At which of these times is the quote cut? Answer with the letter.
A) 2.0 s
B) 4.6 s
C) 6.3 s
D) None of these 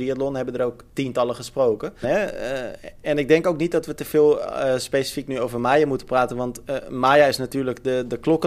A